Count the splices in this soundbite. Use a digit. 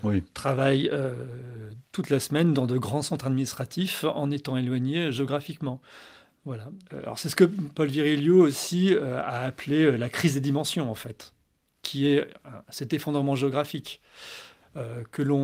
1